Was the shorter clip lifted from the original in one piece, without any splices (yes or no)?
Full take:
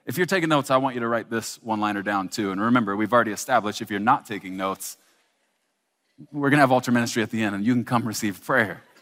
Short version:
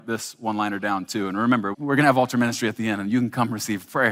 no